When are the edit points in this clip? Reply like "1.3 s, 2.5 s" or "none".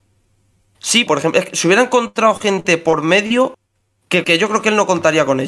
1.1 s, 4.2 s